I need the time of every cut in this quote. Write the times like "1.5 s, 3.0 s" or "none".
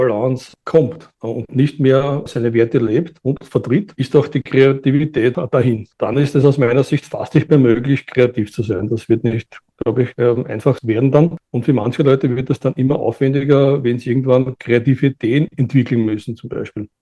none